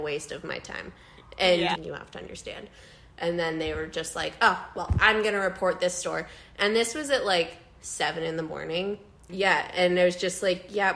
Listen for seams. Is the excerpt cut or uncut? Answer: cut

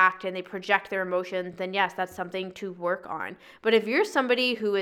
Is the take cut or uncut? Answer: uncut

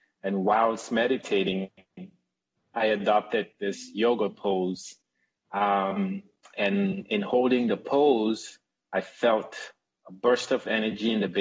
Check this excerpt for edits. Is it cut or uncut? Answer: uncut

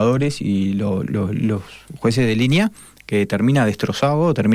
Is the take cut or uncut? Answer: cut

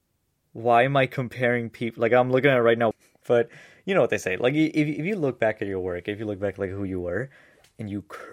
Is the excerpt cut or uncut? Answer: cut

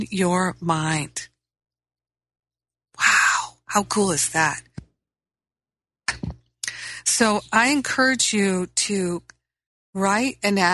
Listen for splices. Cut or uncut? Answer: uncut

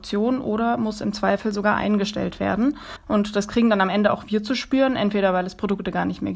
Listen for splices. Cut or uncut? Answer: cut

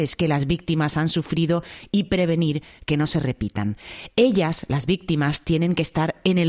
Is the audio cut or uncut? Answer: uncut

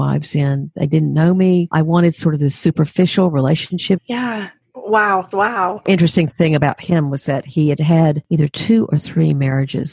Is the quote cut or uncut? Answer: cut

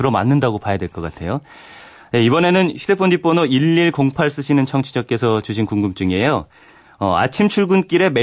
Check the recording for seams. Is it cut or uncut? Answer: uncut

